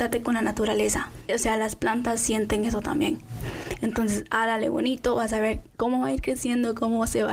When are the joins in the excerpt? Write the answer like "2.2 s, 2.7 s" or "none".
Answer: 1.3 s